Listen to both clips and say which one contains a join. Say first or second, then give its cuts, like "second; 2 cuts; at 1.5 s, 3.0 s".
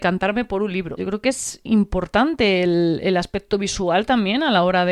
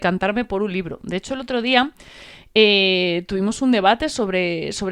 first; 1 cut; at 1.0 s